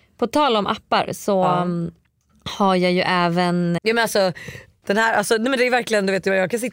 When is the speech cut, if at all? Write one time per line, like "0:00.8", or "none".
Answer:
0:03.8